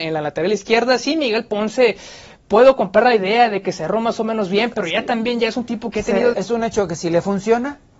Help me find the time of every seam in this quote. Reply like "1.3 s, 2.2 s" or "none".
6.3 s